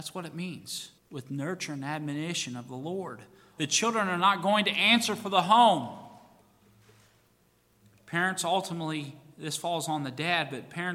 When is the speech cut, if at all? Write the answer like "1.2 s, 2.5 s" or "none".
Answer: 1.0 s, 3.6 s